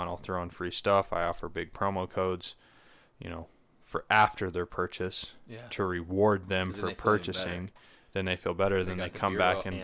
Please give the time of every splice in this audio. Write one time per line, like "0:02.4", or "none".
none